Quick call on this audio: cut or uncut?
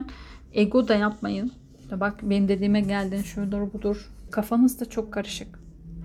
cut